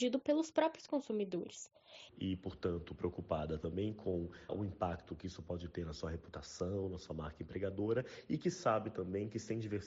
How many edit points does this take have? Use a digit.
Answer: 2